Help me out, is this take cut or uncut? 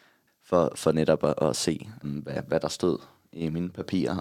cut